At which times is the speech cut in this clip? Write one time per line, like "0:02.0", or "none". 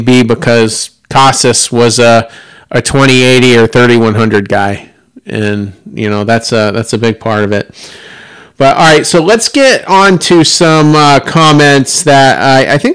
none